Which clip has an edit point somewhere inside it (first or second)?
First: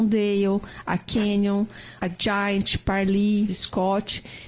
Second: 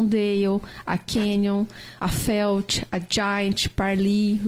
first